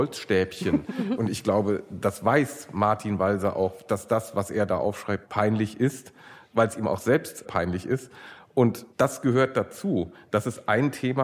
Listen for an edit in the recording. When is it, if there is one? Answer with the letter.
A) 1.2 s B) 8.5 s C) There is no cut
A